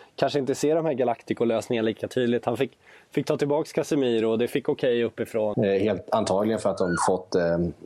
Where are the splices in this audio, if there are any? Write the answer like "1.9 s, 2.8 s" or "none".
5.5 s